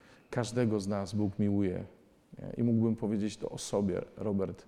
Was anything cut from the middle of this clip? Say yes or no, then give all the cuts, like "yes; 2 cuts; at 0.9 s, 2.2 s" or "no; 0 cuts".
no; 0 cuts